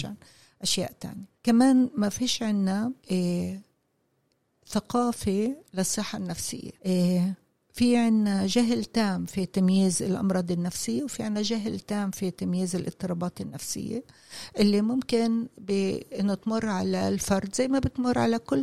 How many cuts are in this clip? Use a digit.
3